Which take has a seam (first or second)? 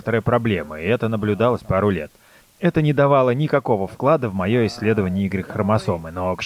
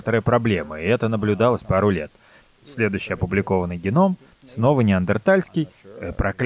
first